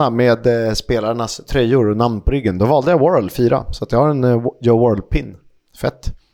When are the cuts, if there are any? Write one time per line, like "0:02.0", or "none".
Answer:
none